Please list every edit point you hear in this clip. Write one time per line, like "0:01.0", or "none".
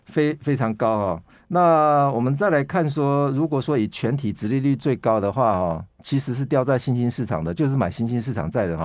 none